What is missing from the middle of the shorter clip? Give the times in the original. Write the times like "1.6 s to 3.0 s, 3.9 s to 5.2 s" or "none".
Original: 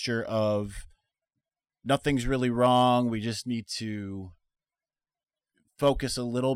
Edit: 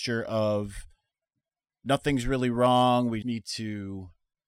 3.2 s to 3.4 s